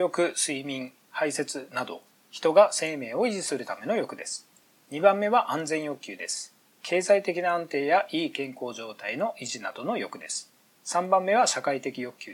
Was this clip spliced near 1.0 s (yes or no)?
no